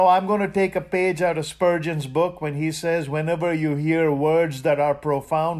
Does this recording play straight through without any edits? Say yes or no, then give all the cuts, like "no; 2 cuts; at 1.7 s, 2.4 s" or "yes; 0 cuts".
yes; 0 cuts